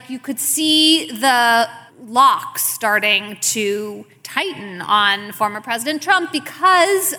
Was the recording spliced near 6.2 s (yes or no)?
no